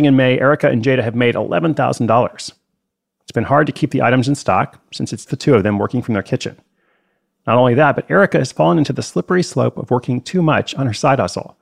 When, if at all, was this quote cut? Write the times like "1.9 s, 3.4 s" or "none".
5.3 s